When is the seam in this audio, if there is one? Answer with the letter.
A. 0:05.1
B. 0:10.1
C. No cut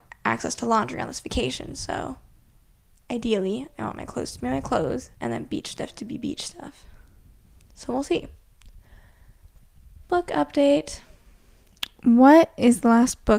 A